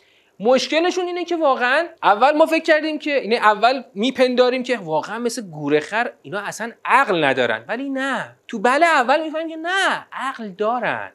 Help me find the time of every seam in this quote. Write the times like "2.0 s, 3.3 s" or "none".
2.0 s, 8.4 s